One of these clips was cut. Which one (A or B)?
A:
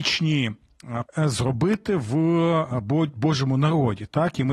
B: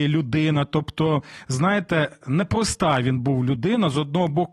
A